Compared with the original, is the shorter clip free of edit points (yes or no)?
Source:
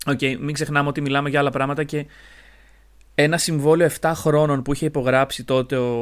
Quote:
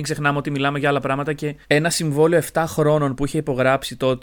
no